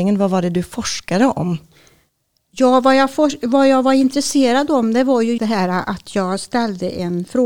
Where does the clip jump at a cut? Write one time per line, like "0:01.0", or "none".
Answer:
0:05.4